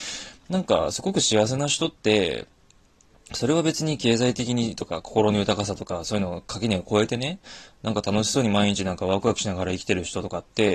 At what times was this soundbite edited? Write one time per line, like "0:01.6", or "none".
none